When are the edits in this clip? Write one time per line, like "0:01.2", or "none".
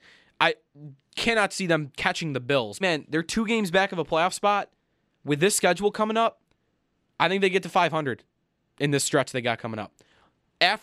0:02.8